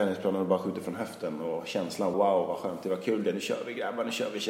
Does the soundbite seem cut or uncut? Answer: cut